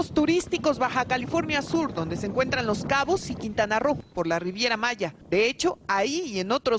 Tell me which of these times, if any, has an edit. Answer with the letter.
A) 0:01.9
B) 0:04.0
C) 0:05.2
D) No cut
C